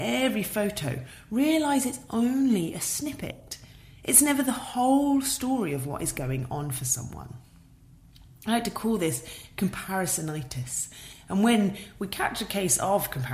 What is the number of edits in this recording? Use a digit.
0